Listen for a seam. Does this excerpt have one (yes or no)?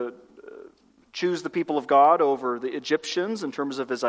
no